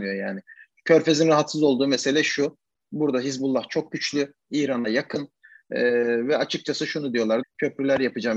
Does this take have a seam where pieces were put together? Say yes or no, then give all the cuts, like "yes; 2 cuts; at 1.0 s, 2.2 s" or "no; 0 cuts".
yes; 1 cut; at 7.4 s